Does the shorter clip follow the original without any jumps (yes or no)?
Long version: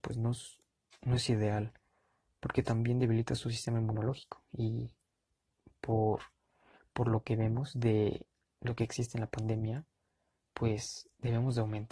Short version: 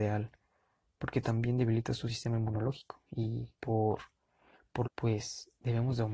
no